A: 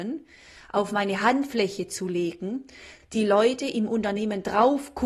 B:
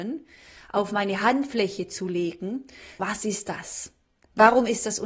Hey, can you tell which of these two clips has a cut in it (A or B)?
B